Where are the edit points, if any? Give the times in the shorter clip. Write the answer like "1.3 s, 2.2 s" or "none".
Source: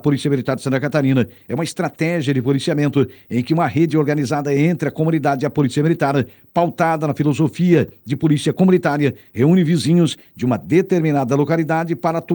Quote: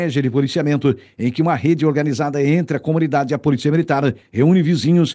4.2 s

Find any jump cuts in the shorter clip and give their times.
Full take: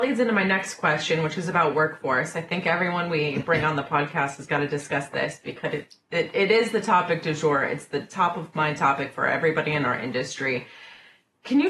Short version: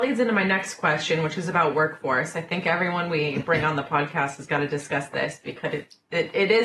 none

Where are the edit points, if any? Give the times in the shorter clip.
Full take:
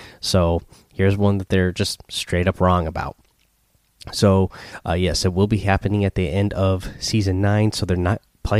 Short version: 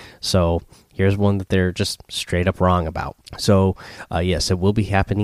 3.3 s

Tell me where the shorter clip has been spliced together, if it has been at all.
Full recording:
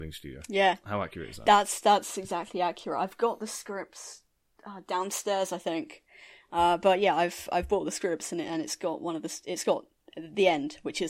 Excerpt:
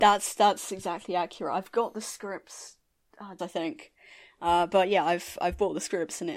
3.4 s

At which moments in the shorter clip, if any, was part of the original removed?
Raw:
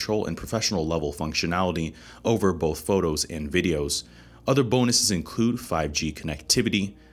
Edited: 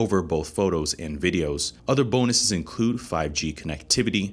1.8 s

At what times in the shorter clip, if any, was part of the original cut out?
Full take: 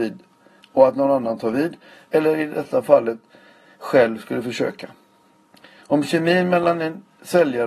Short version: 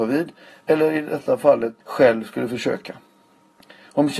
1.8 s

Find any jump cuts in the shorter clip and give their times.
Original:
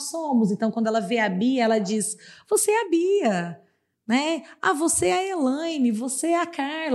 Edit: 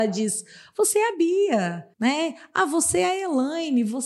1.9 s

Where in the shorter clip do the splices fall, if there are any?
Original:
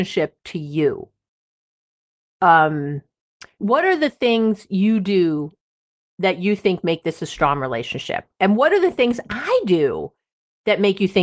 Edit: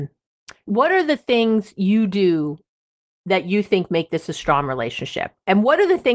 none

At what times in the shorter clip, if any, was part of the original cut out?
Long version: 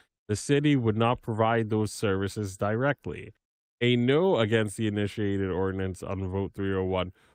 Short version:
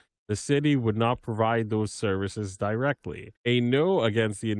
3.4 s

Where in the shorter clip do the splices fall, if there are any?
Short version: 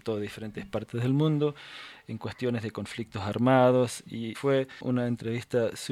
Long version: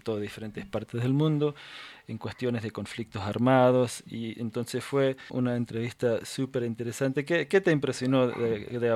4.3 s

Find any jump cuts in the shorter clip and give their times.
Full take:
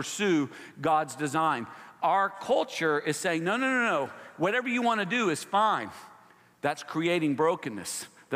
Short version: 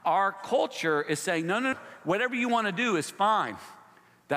1.7 s

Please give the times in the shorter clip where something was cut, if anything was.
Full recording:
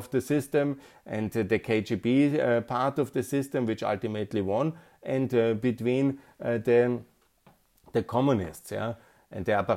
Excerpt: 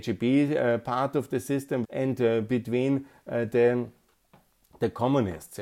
1.8 s

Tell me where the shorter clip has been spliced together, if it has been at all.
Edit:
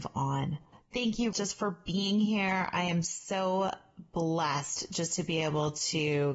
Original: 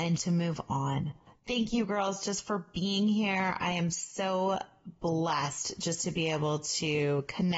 1.3 s

